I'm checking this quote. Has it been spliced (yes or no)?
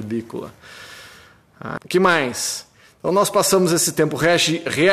yes